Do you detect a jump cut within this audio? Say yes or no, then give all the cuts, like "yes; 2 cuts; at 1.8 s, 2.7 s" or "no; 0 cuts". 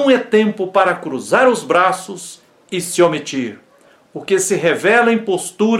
no; 0 cuts